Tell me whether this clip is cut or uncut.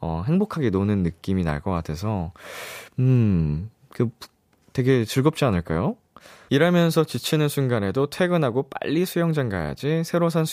cut